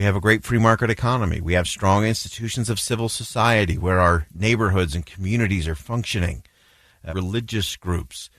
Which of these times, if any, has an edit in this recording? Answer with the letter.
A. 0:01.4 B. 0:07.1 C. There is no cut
B